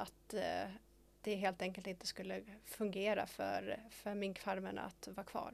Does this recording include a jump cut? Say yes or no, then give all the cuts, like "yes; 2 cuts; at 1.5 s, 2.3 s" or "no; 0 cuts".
no; 0 cuts